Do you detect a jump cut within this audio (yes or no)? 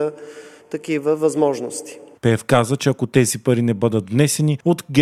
yes